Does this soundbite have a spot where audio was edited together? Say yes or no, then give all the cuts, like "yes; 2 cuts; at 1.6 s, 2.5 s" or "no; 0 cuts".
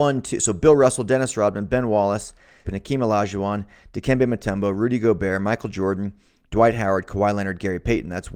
yes; 1 cut; at 2.6 s